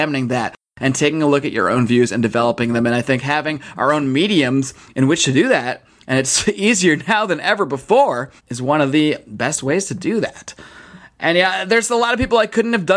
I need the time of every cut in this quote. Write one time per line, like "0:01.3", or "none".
0:08.4